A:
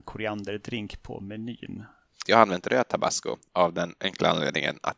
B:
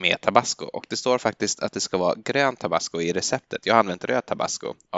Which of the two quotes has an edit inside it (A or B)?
A